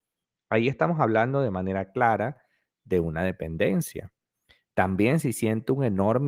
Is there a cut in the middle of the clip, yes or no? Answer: no